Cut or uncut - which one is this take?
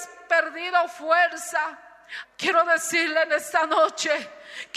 cut